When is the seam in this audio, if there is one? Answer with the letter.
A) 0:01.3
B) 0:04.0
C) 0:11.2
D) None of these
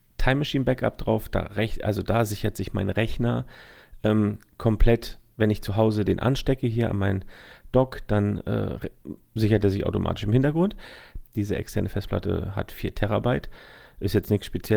C